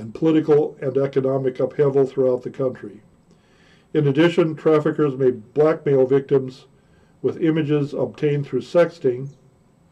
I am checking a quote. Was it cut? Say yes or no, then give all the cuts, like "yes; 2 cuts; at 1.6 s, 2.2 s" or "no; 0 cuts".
no; 0 cuts